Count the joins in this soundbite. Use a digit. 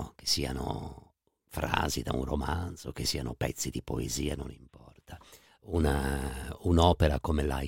1